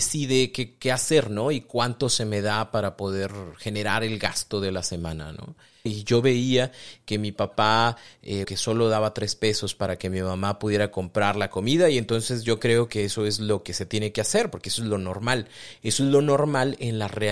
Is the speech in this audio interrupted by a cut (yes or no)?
yes